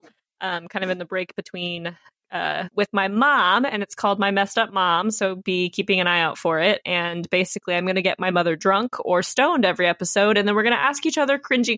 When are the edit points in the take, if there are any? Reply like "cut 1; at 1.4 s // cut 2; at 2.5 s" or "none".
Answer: cut 1; at 2.7 s